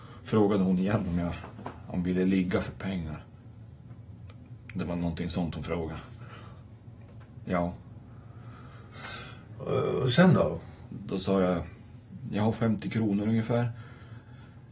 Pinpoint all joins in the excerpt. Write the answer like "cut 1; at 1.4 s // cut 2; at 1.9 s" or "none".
cut 1; at 7.5 s // cut 2; at 10.9 s